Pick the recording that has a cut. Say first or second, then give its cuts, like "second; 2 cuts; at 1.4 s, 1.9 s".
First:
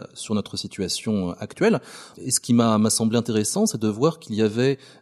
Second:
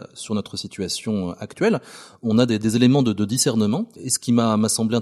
first; 1 cut; at 2.1 s